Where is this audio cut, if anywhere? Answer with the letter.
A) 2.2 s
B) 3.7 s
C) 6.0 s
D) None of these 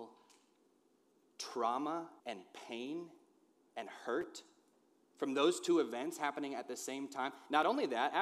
A